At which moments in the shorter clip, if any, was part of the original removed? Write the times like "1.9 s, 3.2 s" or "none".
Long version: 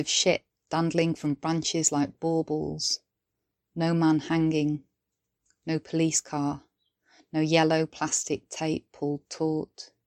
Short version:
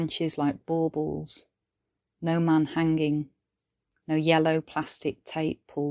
4.0 s